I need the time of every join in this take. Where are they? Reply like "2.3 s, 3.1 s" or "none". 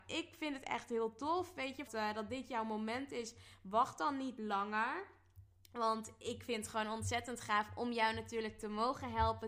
1.9 s